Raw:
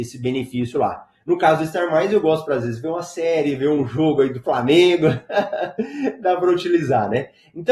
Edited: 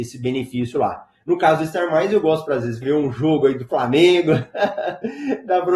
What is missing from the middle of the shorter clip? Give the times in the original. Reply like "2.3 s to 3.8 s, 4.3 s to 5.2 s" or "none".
2.8 s to 3.6 s